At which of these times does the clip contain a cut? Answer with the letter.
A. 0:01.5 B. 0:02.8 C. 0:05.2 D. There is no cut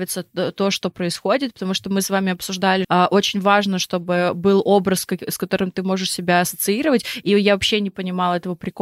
B